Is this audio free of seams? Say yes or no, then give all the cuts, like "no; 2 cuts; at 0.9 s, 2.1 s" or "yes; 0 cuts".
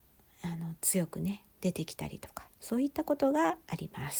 yes; 0 cuts